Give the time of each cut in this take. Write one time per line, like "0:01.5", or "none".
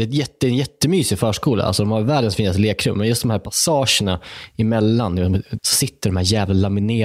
0:05.6